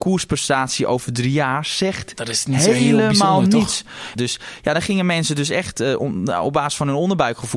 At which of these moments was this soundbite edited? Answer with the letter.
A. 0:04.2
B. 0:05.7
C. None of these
A